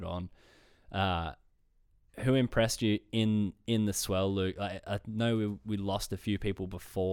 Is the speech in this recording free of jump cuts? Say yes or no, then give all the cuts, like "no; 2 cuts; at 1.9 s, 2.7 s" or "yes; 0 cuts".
yes; 0 cuts